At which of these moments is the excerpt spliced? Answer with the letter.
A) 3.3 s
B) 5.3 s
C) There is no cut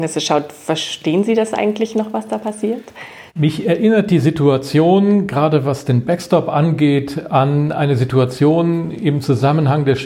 A